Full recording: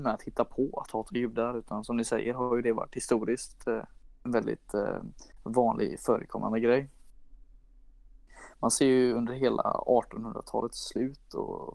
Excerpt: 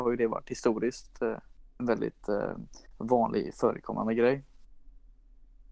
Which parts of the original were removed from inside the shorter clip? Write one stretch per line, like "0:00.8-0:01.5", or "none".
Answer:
none